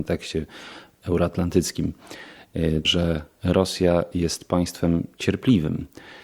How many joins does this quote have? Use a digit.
1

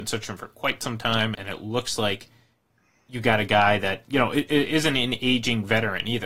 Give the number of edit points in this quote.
1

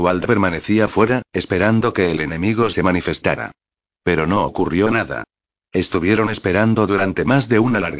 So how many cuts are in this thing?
0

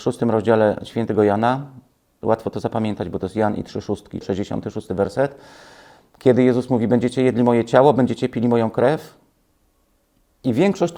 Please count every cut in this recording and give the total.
1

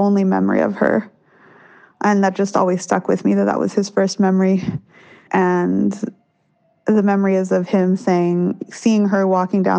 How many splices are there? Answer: 2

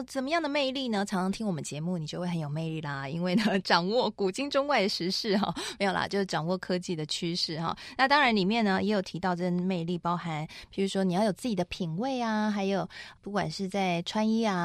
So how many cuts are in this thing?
0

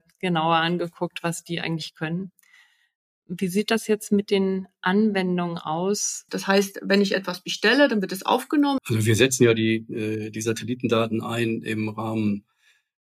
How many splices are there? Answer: 2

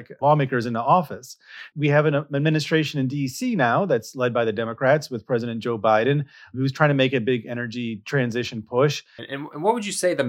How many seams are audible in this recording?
1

